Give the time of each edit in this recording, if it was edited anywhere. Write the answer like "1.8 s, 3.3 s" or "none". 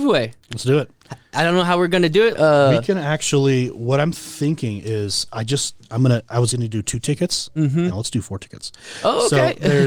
2.3 s, 7.9 s